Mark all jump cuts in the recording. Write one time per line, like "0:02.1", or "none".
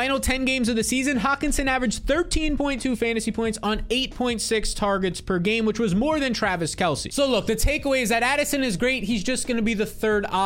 none